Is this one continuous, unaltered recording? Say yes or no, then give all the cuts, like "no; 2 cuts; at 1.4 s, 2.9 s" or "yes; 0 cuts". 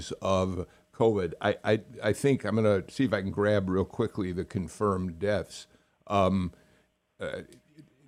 yes; 0 cuts